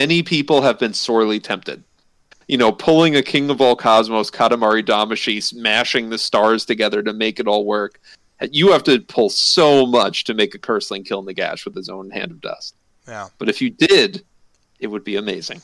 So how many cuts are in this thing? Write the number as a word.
one